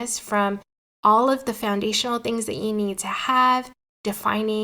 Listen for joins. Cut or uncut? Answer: uncut